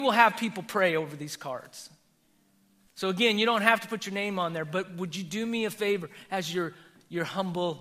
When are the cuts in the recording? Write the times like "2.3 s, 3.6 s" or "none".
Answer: 2.9 s